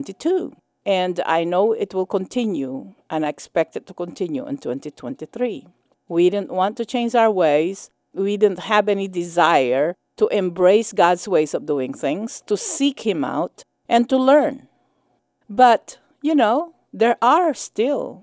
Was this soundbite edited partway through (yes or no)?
yes